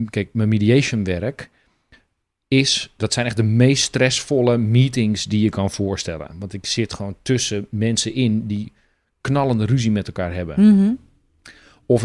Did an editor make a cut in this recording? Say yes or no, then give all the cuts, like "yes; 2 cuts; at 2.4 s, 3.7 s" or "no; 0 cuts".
no; 0 cuts